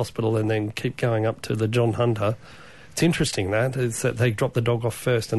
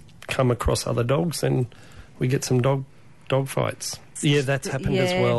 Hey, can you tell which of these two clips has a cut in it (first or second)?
second